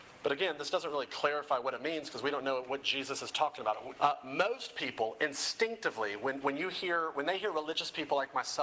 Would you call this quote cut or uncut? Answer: cut